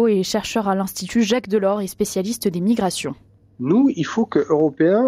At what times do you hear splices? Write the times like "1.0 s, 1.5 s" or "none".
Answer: none